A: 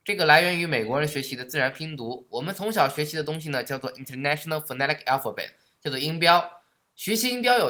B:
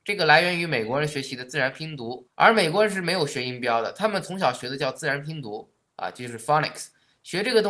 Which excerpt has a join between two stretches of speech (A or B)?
B